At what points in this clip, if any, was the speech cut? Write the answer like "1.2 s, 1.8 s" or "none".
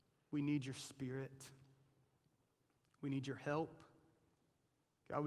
none